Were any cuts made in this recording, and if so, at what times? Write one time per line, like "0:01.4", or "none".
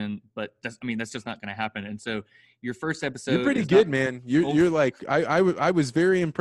none